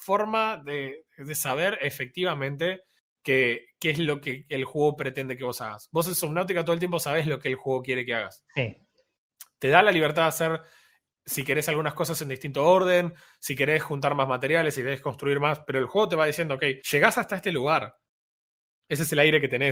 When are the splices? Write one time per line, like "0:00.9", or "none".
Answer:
0:16.8